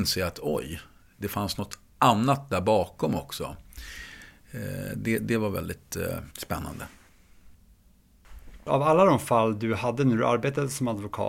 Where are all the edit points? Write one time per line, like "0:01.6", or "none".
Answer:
0:06.3